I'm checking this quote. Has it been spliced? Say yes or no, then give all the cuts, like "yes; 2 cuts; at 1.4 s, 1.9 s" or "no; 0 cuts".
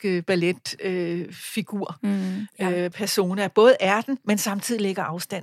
no; 0 cuts